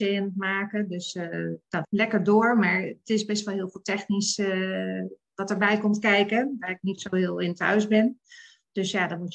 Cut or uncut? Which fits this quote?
cut